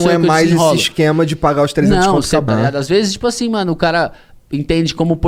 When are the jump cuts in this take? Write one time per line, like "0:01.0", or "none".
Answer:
0:02.5